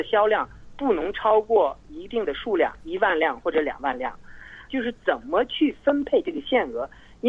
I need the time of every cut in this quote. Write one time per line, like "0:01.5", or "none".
0:02.8
0:04.7